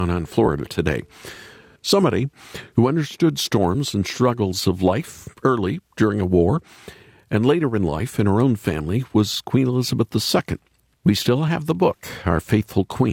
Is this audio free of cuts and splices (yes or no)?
no